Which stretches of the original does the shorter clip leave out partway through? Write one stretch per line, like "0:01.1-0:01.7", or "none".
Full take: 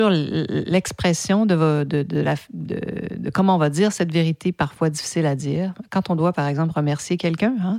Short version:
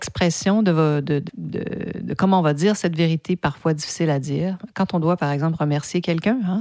0:02.1-0:02.4